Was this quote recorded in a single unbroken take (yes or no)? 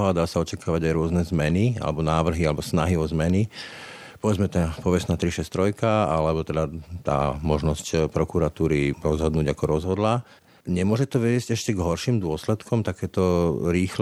yes